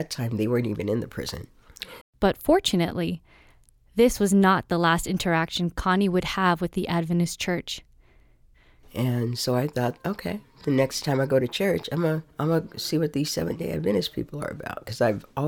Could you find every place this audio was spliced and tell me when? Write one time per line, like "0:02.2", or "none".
0:02.0
0:08.8
0:12.3